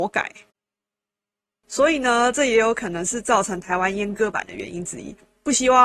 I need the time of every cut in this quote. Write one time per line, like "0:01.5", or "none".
0:01.6